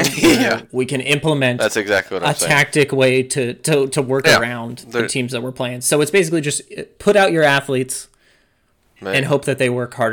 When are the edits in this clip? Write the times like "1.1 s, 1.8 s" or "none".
none

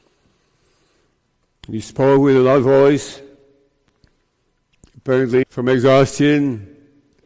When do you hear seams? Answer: 5.4 s

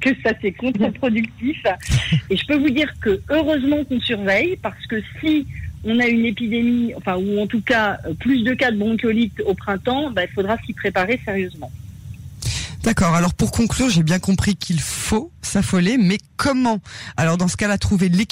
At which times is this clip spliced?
2.3 s

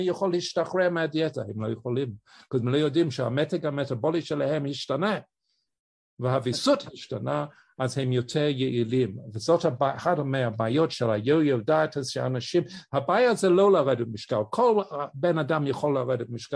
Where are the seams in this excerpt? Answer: none

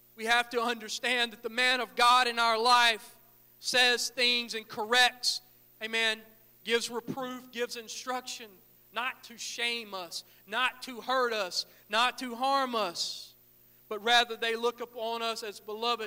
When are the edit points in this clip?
none

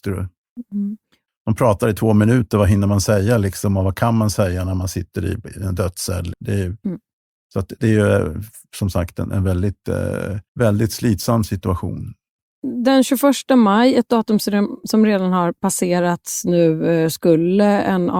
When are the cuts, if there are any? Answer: 6.3 s, 10.5 s

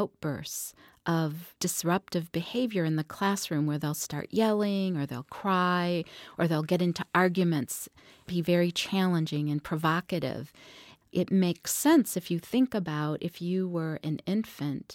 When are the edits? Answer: 11.0 s

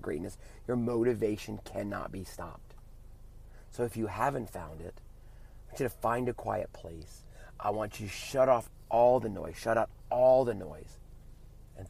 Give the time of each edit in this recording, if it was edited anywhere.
none

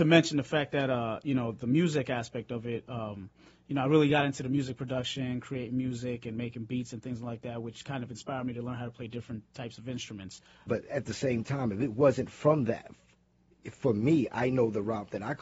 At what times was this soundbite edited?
10.7 s

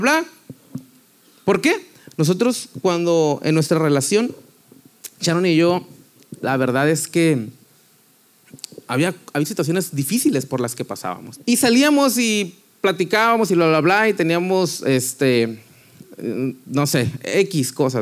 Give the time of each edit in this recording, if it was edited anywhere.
2.1 s, 11.4 s

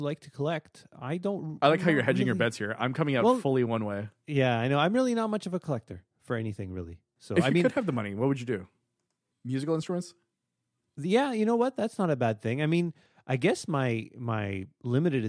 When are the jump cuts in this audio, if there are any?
9.3 s

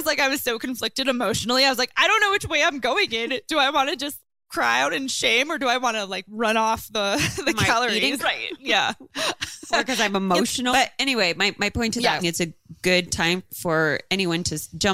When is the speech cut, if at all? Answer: 8.2 s, 10.7 s, 12.2 s

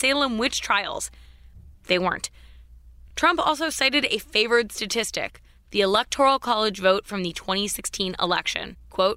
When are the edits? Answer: none

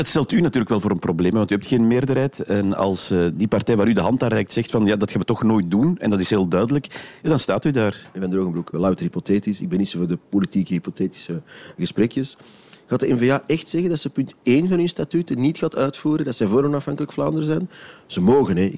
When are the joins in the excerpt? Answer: 8.7 s

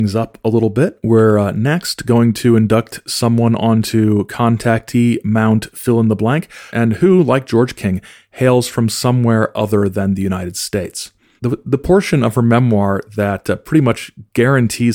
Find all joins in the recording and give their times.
6.7 s, 11.4 s

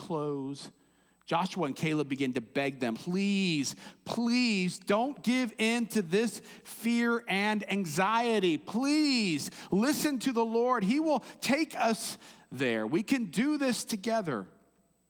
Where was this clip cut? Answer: 2.9 s

